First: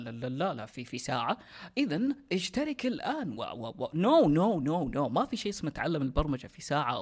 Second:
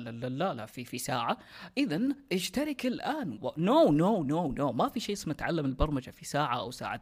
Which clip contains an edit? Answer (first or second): second